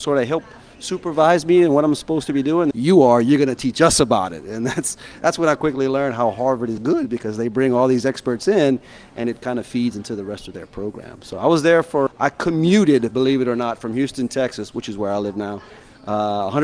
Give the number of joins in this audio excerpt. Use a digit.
3